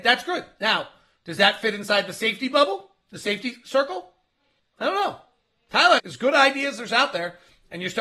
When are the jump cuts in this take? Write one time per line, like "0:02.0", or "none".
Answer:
0:04.6
0:06.0